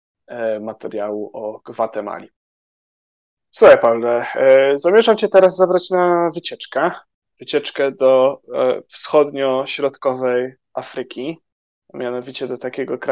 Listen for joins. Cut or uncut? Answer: uncut